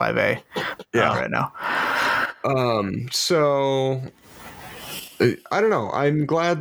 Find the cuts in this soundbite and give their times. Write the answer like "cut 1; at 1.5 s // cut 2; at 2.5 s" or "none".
cut 1; at 1.1 s

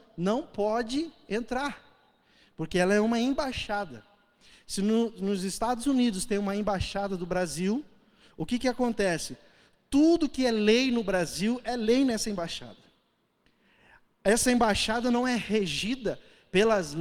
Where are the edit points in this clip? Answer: none

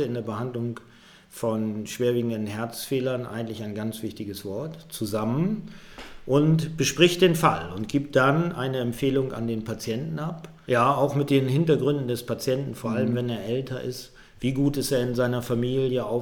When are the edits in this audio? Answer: cut 1; at 10.7 s

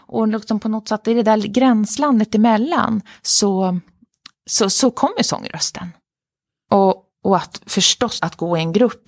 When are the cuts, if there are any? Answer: cut 1; at 8.2 s

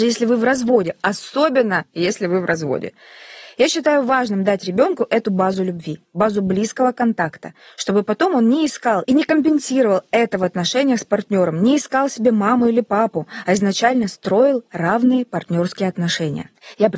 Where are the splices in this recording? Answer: none

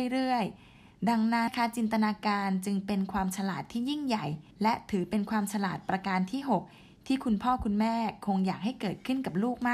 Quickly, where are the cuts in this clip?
cut 1; at 1.5 s // cut 2; at 4.5 s

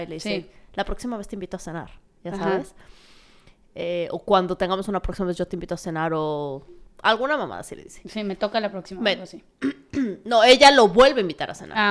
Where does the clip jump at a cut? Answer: none

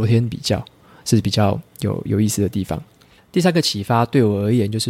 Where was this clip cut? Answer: cut 1; at 3.2 s

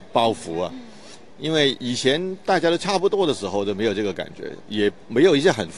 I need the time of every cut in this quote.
cut 1; at 1.3 s // cut 2; at 4.6 s

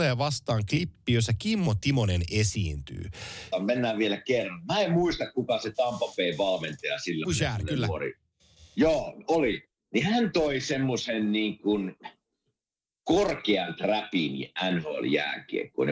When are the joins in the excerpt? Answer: cut 1; at 3.5 s // cut 2; at 7.2 s

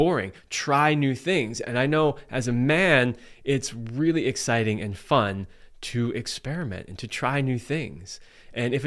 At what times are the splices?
none

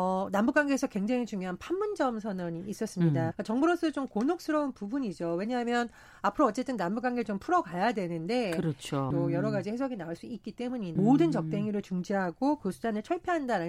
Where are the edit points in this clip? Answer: cut 1; at 3.3 s // cut 2; at 9.1 s // cut 3; at 11.0 s

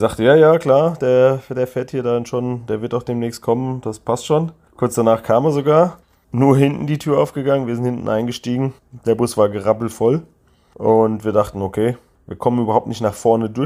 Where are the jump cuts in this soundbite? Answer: none

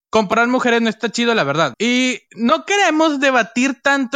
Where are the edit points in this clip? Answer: cut 1; at 1.7 s

